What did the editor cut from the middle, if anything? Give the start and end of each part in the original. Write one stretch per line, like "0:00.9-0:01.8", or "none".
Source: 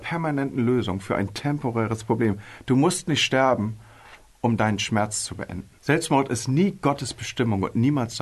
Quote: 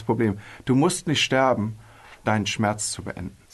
0:04.2-0:04.6